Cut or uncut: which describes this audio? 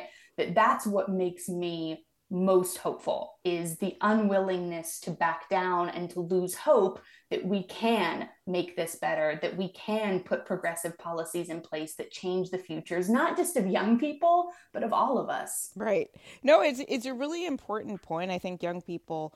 uncut